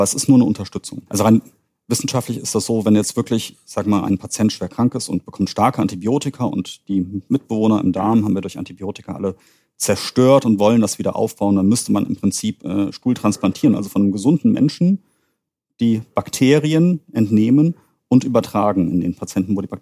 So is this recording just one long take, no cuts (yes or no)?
no